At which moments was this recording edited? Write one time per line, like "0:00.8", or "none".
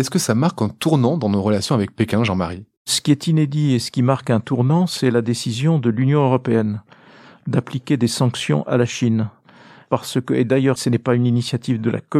0:10.8